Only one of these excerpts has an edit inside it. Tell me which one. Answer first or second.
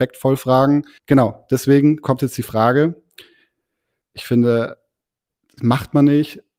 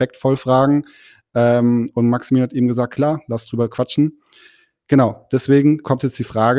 first